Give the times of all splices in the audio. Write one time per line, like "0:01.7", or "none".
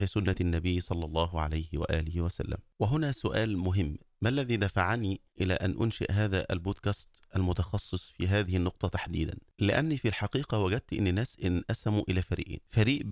none